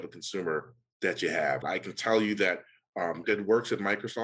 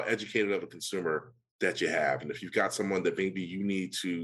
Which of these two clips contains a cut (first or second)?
first